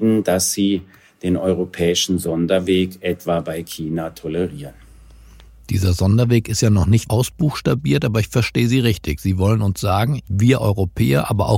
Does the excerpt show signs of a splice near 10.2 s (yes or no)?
yes